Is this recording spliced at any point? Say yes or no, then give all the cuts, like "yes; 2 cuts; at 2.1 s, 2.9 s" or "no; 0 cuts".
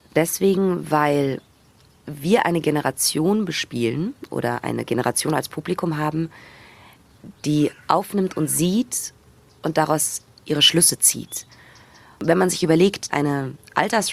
yes; 2 cuts; at 7.4 s, 13.1 s